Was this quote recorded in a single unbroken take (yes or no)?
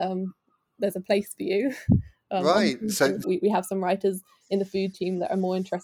no